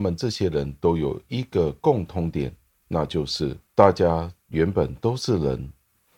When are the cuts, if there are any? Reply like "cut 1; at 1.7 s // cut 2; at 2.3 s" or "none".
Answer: none